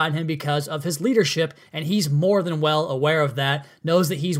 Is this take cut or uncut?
uncut